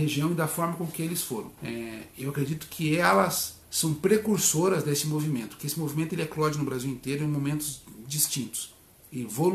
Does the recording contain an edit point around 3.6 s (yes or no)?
yes